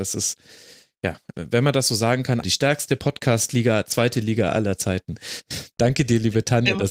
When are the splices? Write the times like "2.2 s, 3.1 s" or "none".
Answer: 1.3 s, 2.4 s